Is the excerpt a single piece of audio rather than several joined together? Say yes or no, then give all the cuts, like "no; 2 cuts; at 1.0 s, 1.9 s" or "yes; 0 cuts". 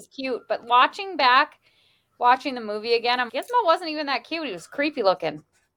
no; 1 cut; at 3.3 s